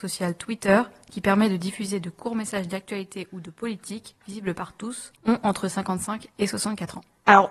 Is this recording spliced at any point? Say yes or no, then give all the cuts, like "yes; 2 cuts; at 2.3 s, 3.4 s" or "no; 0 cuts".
yes; 1 cut; at 5.2 s